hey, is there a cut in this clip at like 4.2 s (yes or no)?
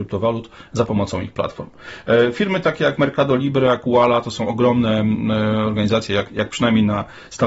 no